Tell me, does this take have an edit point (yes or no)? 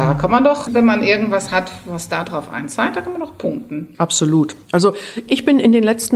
no